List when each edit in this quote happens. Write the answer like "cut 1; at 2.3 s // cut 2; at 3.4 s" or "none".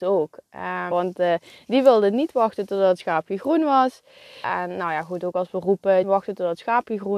cut 1; at 0.9 s // cut 2; at 4.4 s // cut 3; at 6.0 s